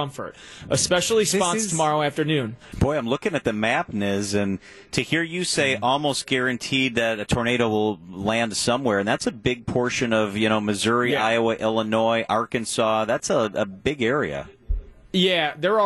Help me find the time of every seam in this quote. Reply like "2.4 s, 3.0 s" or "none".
2.7 s